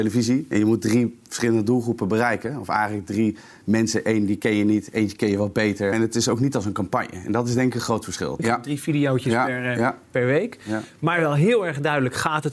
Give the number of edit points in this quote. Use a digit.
2